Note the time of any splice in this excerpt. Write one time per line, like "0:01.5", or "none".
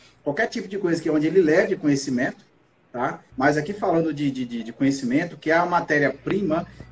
0:03.3